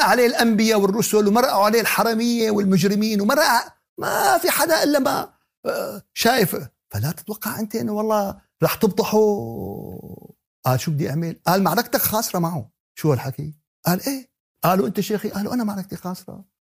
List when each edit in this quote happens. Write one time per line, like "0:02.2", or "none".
none